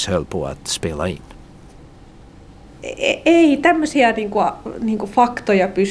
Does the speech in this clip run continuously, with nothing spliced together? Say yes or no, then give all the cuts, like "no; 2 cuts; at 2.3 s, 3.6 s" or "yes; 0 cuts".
yes; 0 cuts